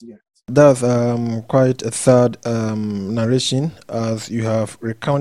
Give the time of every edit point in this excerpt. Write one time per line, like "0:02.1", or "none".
none